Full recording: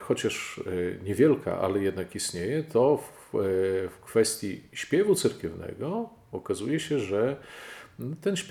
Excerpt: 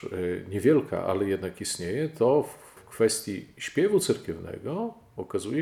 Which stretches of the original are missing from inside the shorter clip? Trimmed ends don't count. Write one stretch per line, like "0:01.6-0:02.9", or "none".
0:03.3-0:03.9